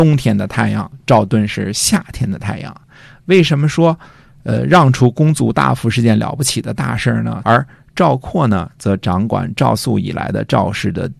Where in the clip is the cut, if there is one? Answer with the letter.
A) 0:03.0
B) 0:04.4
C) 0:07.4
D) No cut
C